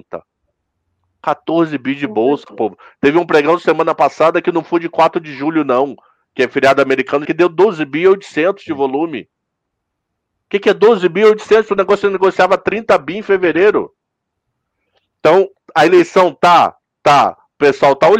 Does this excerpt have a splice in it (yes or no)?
yes